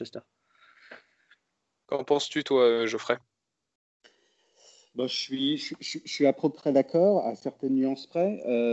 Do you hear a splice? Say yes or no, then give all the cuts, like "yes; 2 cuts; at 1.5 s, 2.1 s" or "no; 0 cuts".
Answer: no; 0 cuts